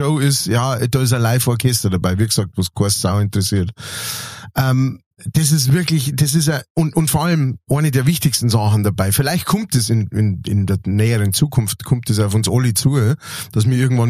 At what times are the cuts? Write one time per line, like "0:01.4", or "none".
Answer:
none